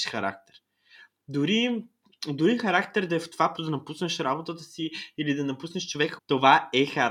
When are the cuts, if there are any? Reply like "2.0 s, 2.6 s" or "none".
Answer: 3.6 s, 6.2 s